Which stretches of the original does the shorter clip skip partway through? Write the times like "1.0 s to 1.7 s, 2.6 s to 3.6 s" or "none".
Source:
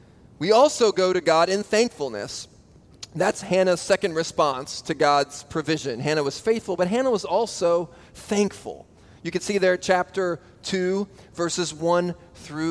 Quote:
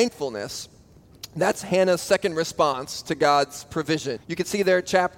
6.0 s to 9.1 s